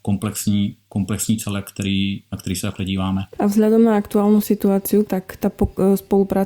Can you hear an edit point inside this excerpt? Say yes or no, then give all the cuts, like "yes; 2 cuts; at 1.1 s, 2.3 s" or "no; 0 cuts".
yes; 2 cuts; at 3.3 s, 5.0 s